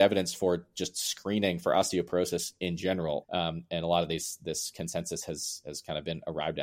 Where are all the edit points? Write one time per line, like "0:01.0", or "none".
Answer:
0:03.2